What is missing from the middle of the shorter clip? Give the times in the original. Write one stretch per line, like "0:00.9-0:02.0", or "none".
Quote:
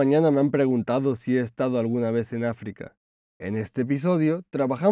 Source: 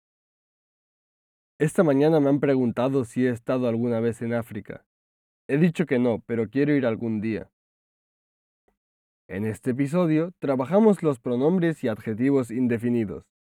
0:05.2-0:09.2

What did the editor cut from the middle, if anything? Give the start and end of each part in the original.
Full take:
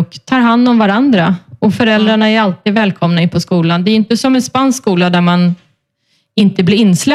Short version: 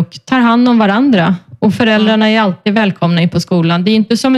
none

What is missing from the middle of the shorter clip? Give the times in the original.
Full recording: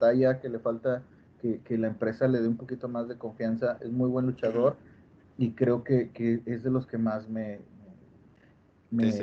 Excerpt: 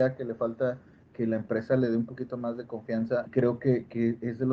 0:01.4-0:01.6
0:03.8-0:05.5

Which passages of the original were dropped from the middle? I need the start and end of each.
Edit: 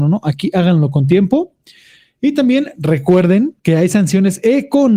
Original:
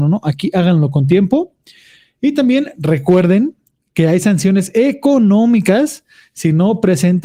0:03.6-0:03.9

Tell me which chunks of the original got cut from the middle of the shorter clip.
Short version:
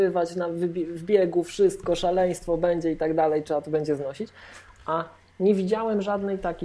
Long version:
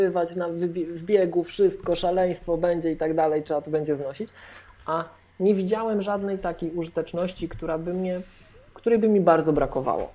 none

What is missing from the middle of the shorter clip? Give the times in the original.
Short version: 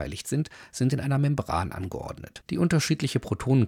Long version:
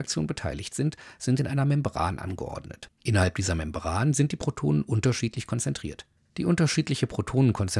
0:02.9-0:06.3

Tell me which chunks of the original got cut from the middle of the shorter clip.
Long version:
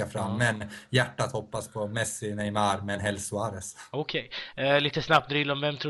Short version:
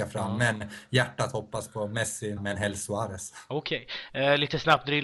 0:02.4-0:02.8

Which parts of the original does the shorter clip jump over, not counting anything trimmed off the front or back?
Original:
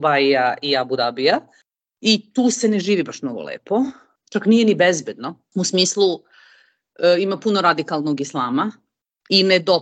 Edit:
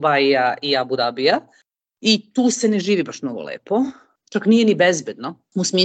none

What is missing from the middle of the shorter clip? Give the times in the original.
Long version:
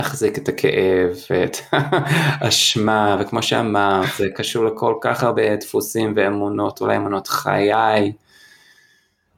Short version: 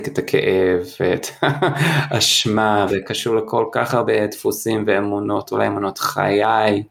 0:03.2-0:04.2

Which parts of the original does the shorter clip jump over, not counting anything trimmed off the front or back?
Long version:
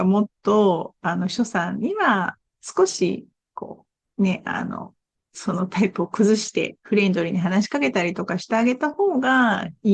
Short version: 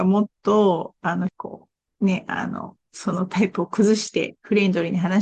0:01.3-0:03.5
0:05.0-0:05.3

